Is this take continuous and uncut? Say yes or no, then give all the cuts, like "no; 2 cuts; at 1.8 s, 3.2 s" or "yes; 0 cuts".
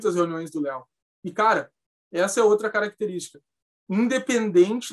yes; 0 cuts